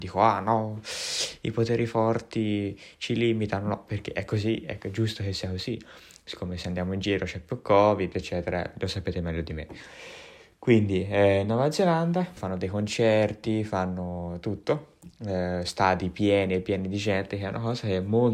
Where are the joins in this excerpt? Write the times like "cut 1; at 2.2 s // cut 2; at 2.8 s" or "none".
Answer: cut 1; at 12.4 s